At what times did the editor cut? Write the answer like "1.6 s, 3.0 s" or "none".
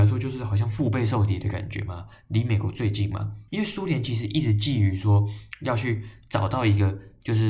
3.5 s